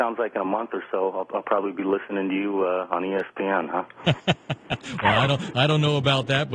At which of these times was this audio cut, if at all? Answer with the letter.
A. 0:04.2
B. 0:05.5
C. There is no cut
C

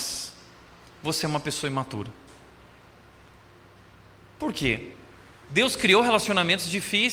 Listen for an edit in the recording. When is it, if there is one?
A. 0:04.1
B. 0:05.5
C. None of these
B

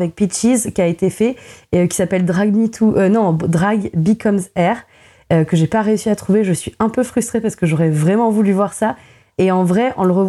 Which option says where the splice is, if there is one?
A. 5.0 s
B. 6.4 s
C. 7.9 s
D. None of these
D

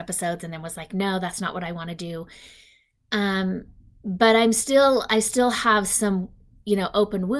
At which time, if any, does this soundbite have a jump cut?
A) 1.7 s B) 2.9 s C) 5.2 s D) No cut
B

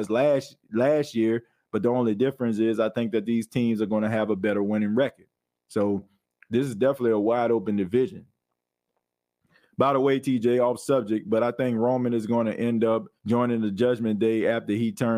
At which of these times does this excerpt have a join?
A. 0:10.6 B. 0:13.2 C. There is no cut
B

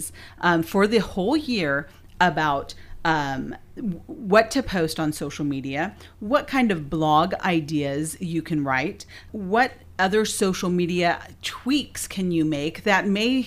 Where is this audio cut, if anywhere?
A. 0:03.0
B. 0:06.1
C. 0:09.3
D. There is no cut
C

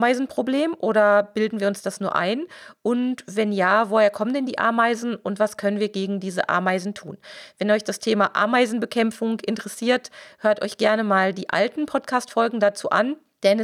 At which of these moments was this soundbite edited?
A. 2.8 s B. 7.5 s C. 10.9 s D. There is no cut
D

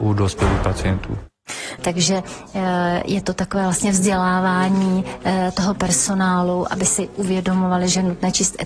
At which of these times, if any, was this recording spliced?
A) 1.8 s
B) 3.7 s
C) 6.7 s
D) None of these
A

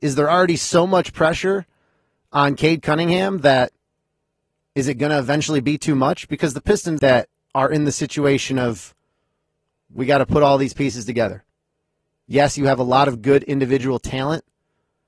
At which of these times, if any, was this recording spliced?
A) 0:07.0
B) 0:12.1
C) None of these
A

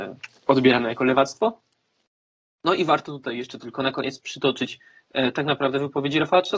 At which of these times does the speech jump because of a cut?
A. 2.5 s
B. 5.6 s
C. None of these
C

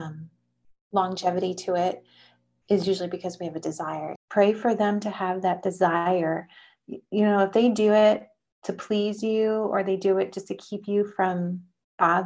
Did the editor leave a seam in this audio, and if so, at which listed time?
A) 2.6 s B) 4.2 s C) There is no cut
B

